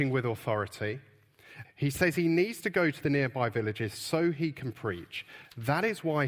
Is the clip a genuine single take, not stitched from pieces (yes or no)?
no